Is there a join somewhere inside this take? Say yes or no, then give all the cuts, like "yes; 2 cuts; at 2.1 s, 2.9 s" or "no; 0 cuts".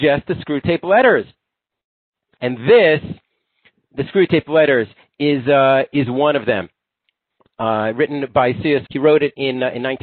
yes; 2 cuts; at 2.4 s, 8.9 s